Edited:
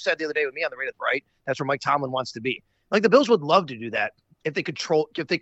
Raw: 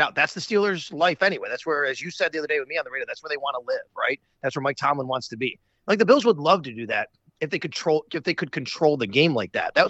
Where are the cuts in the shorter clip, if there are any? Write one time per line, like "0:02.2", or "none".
0:00.9